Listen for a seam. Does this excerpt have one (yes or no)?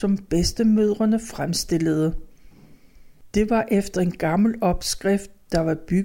no